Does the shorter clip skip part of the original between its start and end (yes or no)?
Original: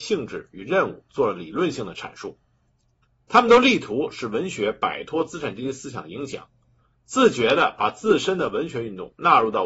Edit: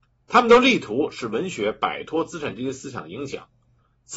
no